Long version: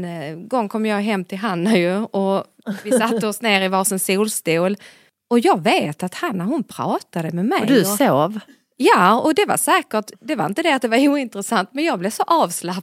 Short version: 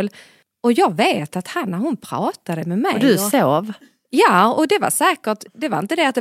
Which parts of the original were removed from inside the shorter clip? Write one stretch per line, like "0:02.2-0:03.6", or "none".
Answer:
none